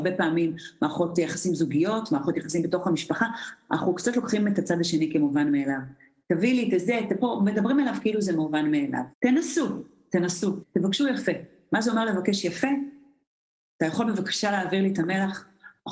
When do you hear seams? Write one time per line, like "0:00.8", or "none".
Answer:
0:09.1
0:10.6